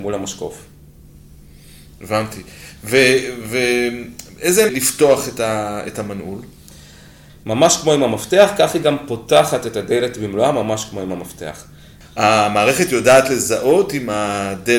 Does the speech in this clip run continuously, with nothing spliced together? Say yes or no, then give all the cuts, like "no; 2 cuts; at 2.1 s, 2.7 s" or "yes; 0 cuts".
no; 3 cuts; at 4.7 s, 7.3 s, 12.0 s